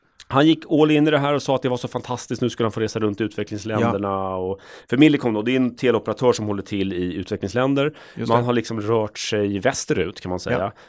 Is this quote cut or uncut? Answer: uncut